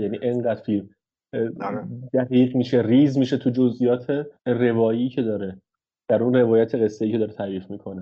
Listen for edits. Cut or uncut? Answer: cut